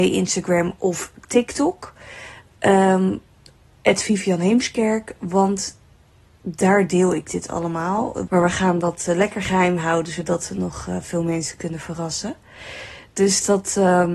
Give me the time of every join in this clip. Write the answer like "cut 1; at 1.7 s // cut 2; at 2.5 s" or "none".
cut 1; at 8.3 s